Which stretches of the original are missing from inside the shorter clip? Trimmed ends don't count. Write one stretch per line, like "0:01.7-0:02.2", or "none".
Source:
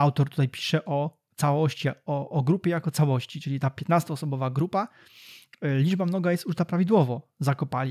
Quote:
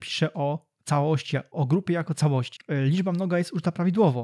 0:02.0-0:02.3
0:03.3-0:05.5